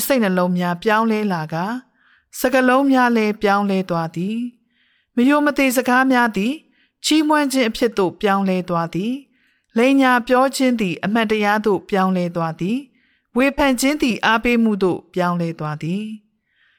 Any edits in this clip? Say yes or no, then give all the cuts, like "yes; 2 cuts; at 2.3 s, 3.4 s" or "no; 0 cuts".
no; 0 cuts